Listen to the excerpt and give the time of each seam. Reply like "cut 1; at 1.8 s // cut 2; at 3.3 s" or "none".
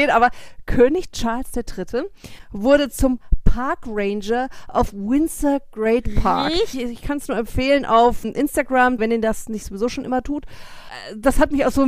cut 1; at 6.7 s // cut 2; at 9.0 s